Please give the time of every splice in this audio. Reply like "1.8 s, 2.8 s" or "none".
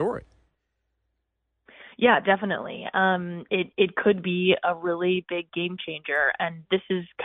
none